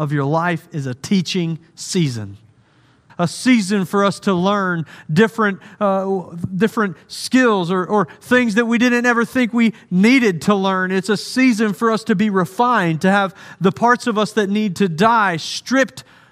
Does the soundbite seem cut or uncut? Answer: cut